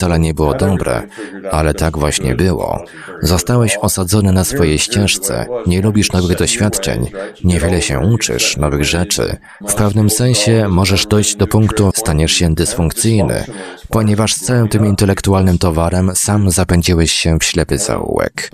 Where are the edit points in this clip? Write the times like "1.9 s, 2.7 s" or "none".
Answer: 9.6 s, 11.9 s